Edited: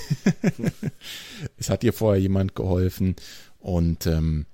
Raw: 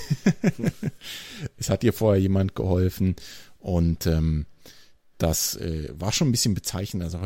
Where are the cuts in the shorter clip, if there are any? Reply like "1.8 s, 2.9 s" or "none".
none